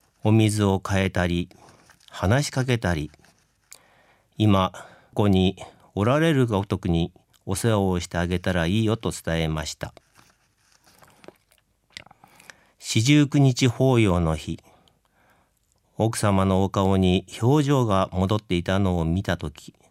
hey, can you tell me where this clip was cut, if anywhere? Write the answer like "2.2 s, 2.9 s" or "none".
5.1 s